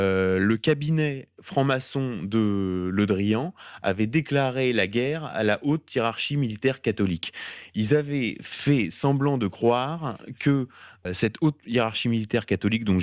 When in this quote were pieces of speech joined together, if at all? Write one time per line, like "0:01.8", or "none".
0:11.0